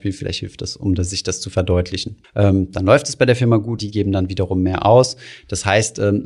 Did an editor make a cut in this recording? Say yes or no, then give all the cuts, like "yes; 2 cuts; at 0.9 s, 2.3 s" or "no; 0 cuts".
yes; 2 cuts; at 2.2 s, 3.8 s